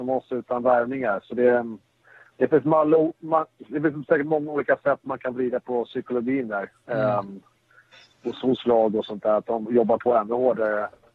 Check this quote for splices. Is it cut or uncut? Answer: cut